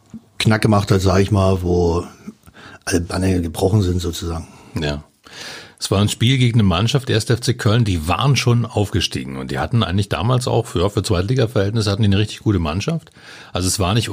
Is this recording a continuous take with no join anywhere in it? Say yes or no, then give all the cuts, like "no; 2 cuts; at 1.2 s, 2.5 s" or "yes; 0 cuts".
yes; 0 cuts